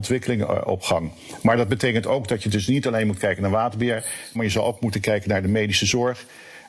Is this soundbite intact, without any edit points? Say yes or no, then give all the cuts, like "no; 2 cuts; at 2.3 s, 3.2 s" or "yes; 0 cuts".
no; 1 cut; at 4.3 s